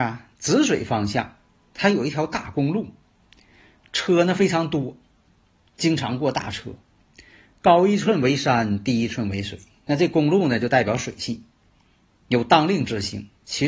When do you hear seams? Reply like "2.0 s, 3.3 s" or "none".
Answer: none